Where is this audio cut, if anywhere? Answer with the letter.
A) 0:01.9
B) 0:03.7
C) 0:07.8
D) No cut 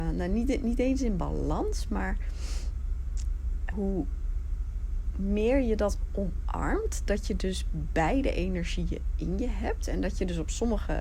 B